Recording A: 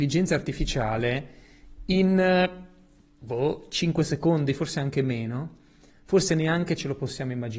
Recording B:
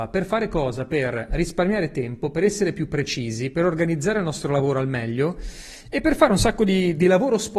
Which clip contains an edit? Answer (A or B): A